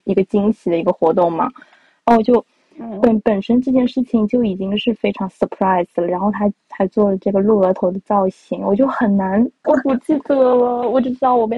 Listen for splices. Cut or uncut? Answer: cut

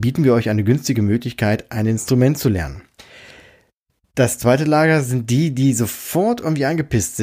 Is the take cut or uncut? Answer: uncut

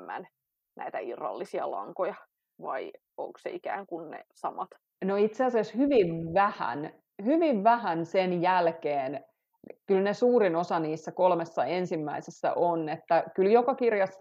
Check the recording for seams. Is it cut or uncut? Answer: uncut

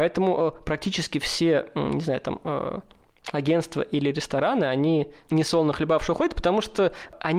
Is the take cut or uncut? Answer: uncut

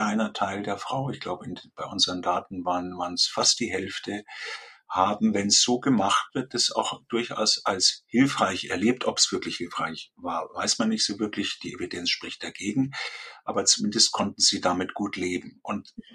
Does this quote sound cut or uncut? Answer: uncut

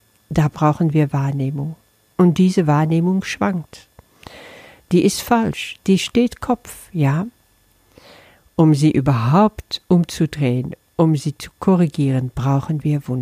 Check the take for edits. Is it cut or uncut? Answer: uncut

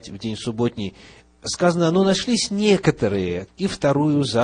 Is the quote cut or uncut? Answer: cut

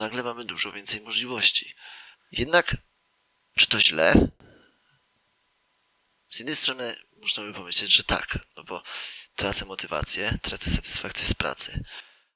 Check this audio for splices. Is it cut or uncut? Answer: cut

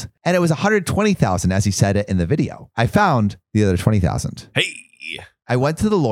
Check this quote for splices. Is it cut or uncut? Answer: uncut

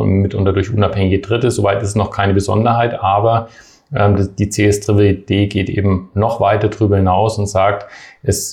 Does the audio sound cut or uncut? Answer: uncut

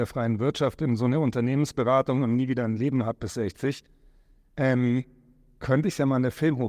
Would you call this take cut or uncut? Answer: uncut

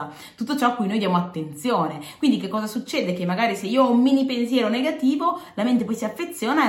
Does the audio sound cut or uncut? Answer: uncut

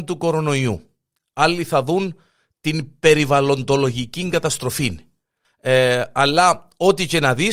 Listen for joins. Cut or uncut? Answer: cut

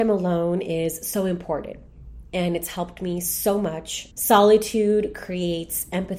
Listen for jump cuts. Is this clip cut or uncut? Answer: cut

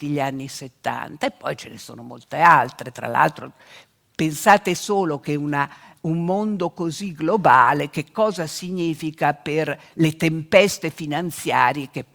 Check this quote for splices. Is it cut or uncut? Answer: uncut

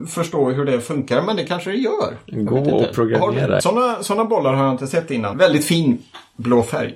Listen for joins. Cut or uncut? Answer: cut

